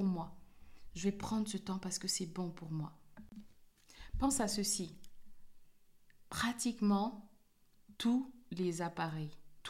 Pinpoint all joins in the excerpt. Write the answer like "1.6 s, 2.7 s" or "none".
none